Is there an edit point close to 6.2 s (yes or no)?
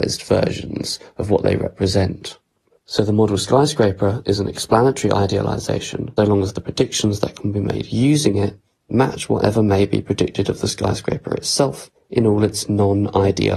yes